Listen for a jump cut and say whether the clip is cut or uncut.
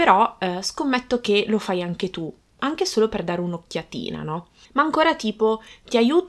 cut